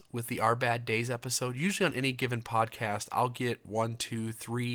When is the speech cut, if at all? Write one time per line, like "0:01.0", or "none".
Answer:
none